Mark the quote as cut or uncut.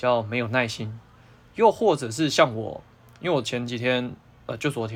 uncut